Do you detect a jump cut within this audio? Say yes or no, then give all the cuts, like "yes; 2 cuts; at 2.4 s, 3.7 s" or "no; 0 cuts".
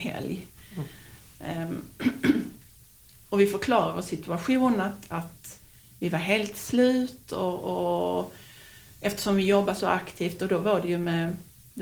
no; 0 cuts